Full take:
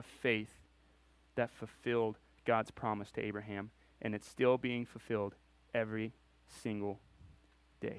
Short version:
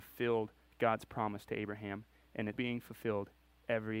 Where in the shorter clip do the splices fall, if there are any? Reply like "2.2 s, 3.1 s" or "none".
2.5 s